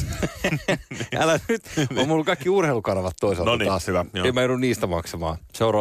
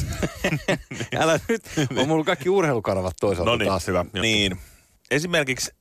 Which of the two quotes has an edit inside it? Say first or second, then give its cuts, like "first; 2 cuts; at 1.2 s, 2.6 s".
second; 1 cut; at 4.2 s